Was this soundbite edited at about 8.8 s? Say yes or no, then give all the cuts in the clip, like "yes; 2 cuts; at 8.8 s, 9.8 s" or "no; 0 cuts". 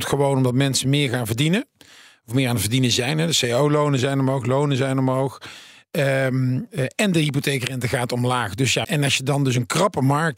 yes; 1 cut; at 8.8 s